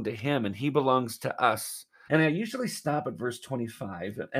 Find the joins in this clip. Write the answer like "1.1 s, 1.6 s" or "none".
2.1 s